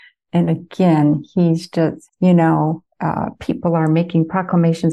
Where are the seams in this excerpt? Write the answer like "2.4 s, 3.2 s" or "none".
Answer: 2.1 s